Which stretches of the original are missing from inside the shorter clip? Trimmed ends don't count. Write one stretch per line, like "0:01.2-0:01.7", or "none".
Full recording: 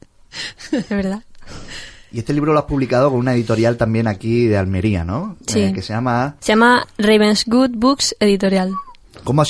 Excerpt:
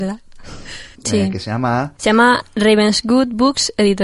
0:02.0-0:05.4